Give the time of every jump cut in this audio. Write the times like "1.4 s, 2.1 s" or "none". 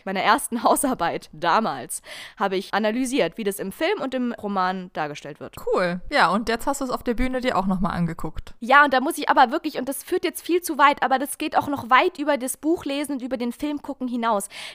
none